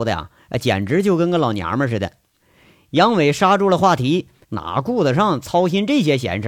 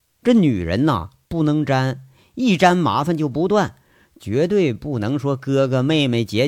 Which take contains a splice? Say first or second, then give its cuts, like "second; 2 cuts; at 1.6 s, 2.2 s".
first; 2 cuts; at 2.4 s, 4.4 s